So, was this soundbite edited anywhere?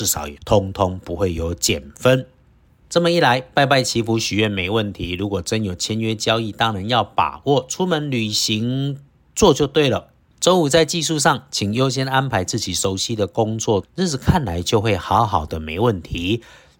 yes; 2 cuts; at 10.3 s, 13.8 s

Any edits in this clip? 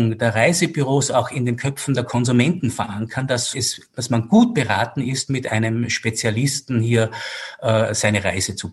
yes; 1 cut; at 3.5 s

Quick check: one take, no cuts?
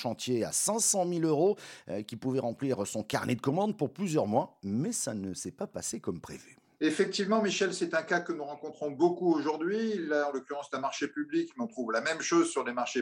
yes; 0 cuts

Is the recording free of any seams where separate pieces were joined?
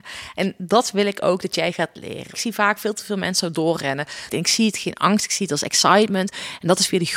no; 1 cut; at 4.3 s

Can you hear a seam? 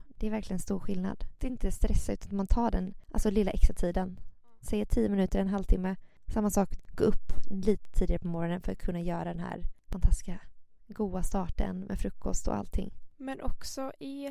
yes; 1 cut; at 6.8 s

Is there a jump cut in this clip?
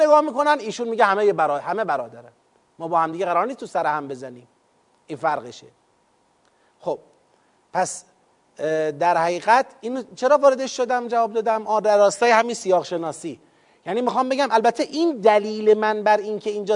no; 0 cuts

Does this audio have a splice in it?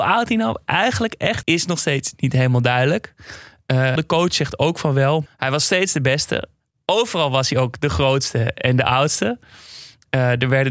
yes; 3 cuts; at 1.4 s, 4.0 s, 5.3 s

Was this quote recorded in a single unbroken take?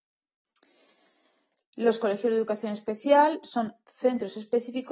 yes; 0 cuts

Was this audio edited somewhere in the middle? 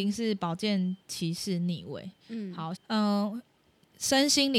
yes; 1 cut; at 2.8 s

